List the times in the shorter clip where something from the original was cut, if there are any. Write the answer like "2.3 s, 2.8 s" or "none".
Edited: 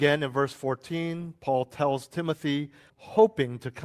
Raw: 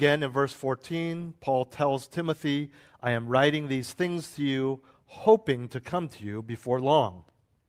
2.9 s

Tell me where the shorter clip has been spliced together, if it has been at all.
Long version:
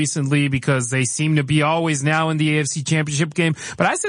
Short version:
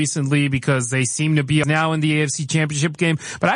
1.6 s

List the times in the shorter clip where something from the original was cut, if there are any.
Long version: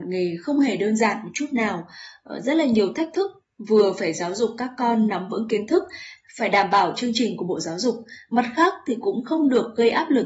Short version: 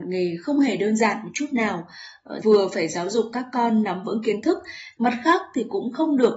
2.4 s, 5.0 s

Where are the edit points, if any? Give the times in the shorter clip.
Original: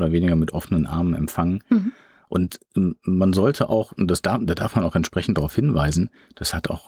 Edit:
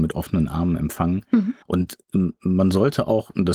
1.6 s

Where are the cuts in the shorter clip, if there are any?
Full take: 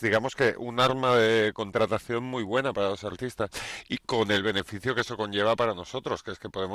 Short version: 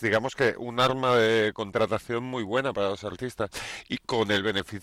none

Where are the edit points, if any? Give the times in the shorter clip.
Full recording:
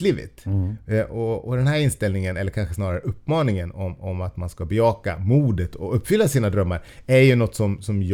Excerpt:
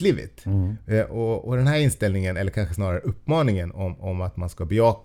none

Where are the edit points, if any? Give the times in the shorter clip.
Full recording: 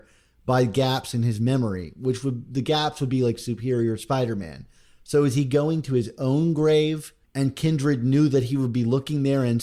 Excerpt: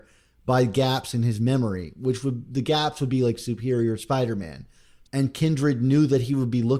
5.0 s

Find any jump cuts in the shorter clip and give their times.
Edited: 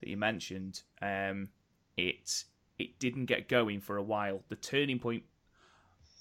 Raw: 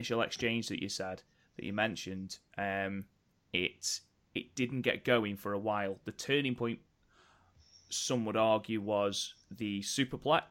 none

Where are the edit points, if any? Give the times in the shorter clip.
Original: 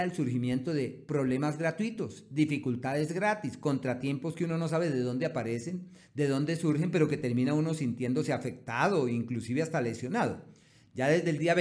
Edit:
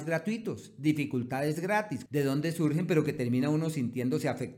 2.1 s

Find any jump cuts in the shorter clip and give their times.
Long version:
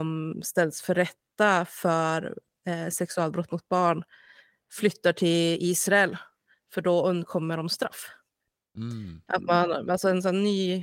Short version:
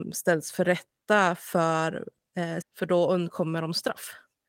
2.6 s

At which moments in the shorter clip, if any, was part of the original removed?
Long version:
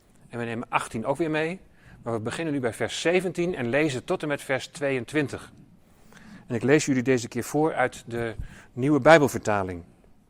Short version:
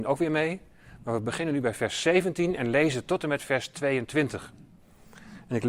none

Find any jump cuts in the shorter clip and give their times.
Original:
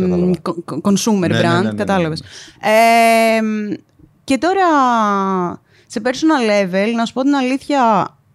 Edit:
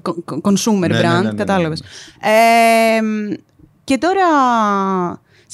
none

